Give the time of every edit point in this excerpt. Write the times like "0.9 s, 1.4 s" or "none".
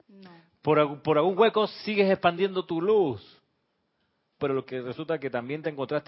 4.4 s